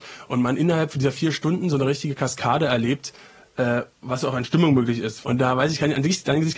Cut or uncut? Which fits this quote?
cut